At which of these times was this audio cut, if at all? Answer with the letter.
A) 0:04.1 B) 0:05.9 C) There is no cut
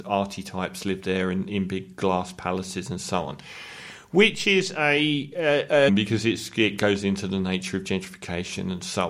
B